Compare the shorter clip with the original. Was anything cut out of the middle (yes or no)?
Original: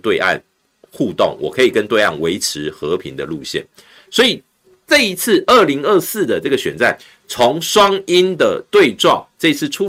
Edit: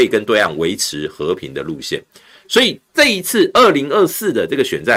yes